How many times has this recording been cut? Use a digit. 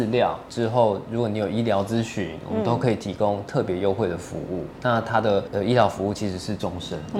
0